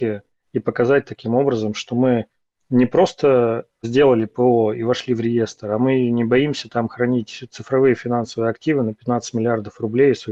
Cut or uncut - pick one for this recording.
uncut